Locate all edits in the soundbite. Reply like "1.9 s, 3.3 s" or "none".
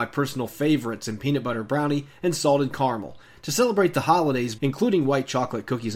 4.6 s